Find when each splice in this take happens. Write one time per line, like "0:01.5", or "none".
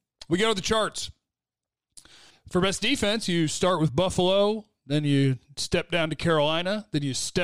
0:02.3